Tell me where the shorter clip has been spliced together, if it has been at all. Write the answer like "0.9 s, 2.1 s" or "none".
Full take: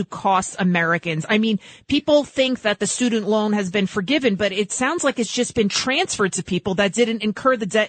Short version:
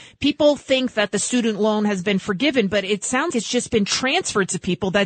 3.3 s